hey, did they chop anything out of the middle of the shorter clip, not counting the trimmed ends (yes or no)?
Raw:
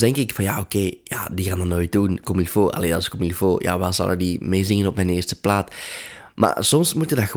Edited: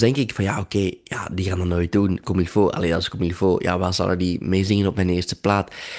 no